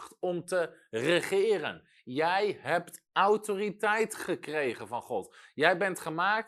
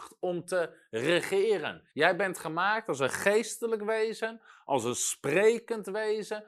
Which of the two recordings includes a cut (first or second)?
second